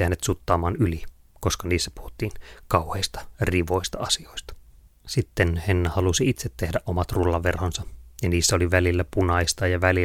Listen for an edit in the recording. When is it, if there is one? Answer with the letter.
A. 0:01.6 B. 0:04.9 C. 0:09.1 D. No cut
B